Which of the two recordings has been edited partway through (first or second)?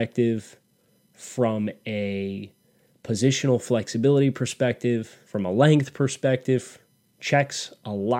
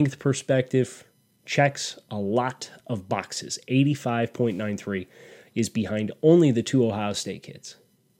first